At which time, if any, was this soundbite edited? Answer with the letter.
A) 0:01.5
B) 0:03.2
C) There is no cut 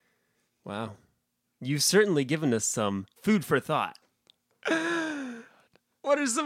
B